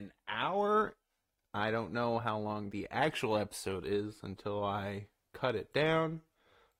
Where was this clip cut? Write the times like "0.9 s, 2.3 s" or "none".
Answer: none